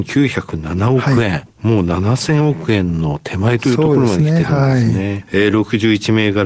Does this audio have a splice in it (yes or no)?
no